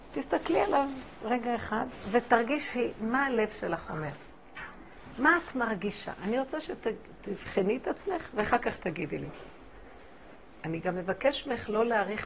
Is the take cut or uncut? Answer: uncut